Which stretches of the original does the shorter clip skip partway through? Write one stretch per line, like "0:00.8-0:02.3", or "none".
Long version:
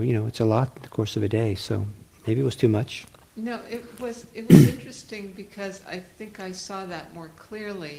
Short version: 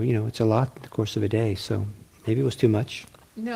none